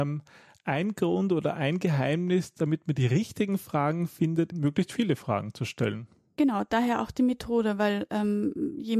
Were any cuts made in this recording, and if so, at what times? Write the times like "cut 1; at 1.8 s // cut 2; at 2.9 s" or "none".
cut 1; at 4.5 s